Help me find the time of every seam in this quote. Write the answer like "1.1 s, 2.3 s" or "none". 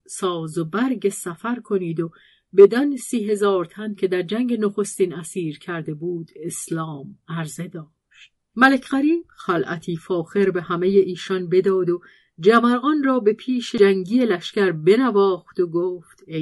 8.5 s